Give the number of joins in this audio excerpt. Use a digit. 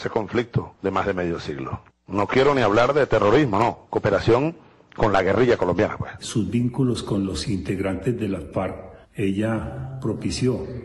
3